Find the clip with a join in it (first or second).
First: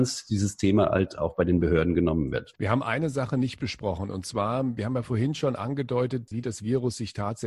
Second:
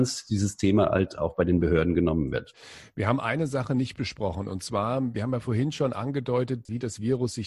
first